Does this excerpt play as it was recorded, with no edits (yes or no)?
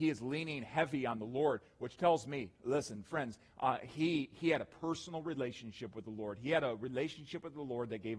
yes